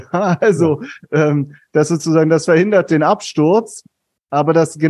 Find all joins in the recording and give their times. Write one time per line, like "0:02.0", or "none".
none